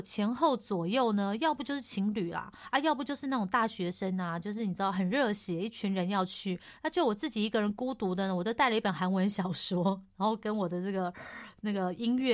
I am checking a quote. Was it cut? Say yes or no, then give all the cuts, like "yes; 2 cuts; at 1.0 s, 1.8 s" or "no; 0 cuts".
no; 0 cuts